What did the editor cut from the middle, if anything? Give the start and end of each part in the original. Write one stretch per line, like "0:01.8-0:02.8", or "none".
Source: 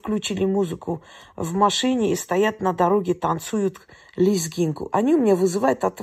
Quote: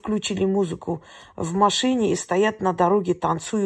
none